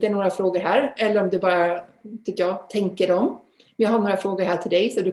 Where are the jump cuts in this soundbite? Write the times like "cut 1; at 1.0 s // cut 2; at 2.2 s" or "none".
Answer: none